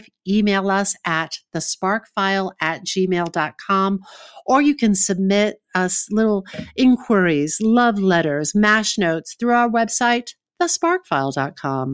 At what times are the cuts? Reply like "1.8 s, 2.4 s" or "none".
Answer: none